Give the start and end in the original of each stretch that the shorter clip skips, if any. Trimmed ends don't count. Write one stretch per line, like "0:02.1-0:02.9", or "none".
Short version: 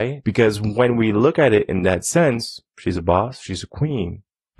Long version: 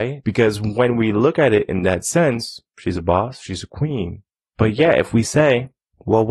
none